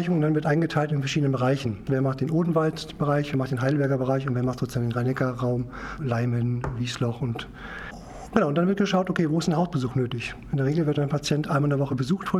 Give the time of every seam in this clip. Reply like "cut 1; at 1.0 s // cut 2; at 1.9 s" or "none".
cut 1; at 6.0 s